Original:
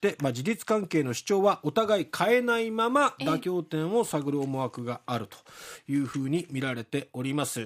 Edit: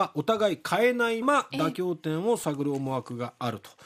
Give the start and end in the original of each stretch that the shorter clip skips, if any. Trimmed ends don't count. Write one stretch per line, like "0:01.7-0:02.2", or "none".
0:02.7-0:02.9